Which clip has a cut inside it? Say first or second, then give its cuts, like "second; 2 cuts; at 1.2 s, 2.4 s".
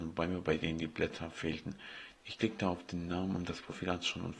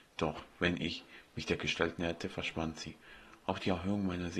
first; 1 cut; at 2.2 s